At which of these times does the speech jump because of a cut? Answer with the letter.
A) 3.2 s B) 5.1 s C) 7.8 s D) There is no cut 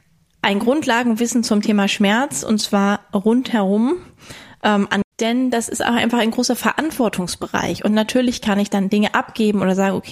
B